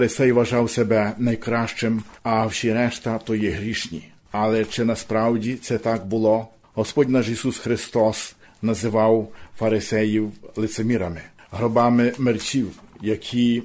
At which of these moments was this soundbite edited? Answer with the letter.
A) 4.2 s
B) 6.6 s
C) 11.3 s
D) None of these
D